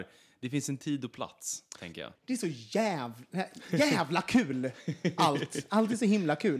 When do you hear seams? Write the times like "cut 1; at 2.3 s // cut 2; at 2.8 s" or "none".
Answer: cut 1; at 2.2 s